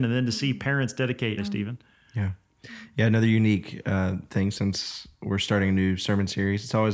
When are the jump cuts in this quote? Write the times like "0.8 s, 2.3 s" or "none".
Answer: 1.4 s